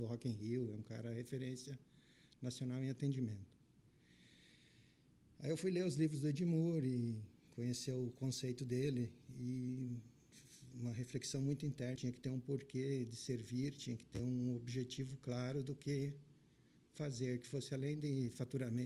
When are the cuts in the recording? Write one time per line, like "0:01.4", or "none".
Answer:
0:12.0